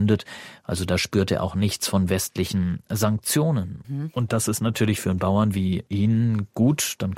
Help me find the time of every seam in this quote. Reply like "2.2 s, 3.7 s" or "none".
3.8 s